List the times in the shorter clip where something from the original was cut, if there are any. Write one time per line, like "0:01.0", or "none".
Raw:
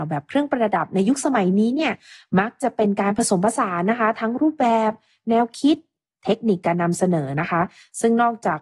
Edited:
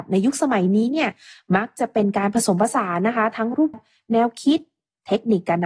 0:03.7